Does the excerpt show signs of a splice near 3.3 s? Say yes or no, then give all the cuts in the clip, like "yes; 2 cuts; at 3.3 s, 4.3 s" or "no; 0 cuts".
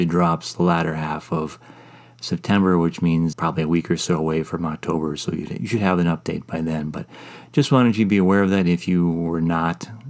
yes; 1 cut; at 3.3 s